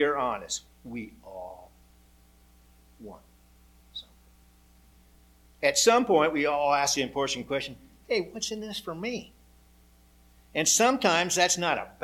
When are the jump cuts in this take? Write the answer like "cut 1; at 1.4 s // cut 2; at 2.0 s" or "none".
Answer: none